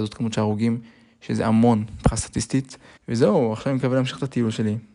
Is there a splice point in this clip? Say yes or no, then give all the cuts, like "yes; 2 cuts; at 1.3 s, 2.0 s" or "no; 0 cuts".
yes; 1 cut; at 3.0 s